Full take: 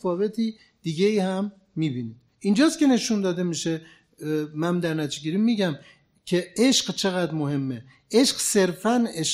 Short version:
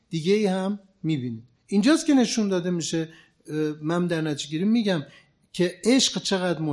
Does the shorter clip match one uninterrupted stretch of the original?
yes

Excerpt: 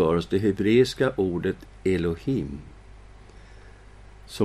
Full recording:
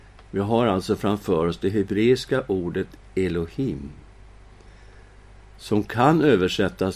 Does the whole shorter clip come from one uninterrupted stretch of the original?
yes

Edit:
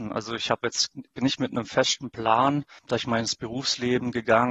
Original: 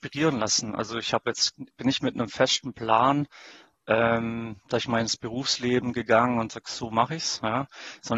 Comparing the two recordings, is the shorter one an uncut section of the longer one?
no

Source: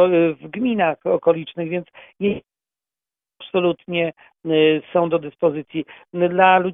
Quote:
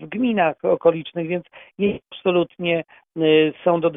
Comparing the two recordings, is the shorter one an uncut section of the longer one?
no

